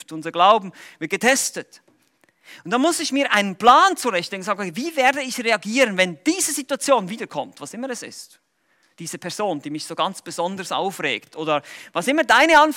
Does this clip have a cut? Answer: no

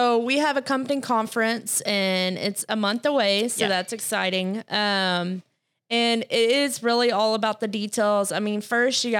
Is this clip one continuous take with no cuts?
yes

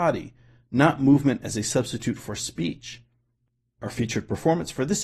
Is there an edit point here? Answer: no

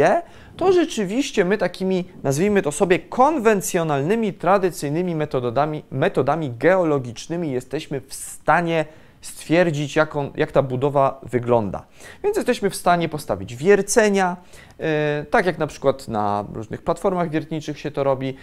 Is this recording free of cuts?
yes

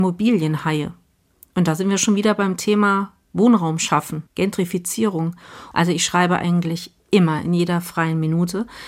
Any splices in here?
yes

